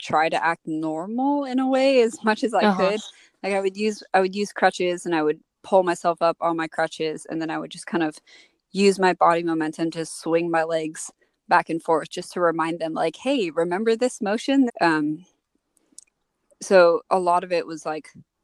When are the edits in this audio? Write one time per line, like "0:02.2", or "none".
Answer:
0:14.7
0:17.0